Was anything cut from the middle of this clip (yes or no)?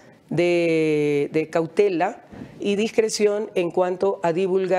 yes